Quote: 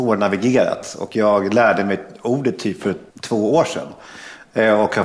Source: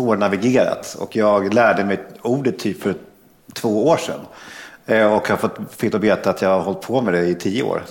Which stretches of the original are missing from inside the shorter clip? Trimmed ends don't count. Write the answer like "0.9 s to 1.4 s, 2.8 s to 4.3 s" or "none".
3.1 s to 3.4 s